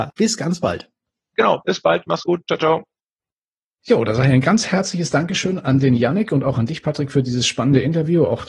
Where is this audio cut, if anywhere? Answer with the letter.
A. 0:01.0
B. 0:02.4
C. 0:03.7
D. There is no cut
D